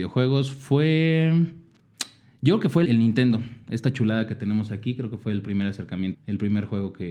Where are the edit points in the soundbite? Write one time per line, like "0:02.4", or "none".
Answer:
0:02.9
0:06.1